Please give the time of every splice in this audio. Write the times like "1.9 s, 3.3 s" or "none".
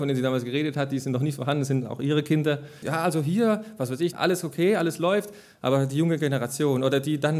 2.8 s, 4.1 s